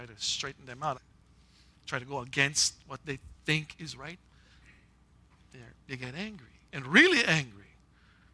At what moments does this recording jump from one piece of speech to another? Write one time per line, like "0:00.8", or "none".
0:00.9
0:06.7